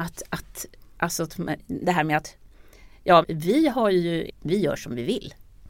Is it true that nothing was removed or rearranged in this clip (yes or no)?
no